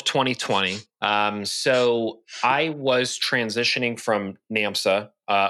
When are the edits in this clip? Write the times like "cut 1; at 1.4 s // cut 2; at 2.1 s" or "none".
none